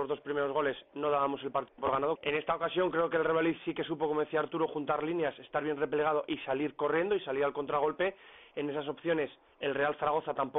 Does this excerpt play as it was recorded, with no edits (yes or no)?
no